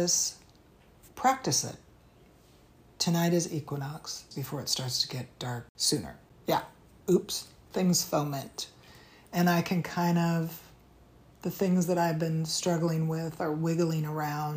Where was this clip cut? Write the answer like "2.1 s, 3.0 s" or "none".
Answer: 4.3 s, 6.3 s